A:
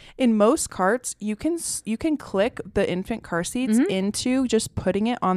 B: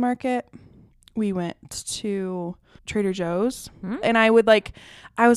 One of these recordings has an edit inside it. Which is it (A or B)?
B